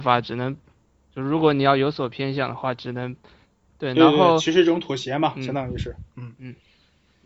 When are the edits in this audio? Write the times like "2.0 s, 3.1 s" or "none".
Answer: 3.7 s